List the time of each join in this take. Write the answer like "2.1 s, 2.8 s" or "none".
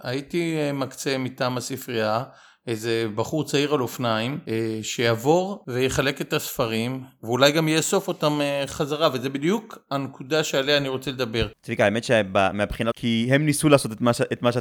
12.9 s